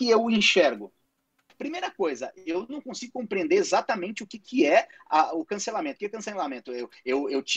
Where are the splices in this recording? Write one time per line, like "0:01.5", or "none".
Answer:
0:01.5